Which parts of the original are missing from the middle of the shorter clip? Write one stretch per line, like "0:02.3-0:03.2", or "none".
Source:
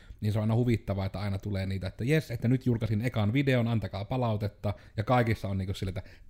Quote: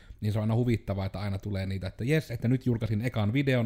none